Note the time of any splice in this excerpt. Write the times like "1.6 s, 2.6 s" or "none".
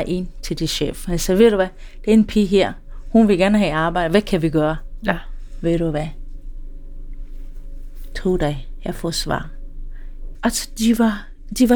10.3 s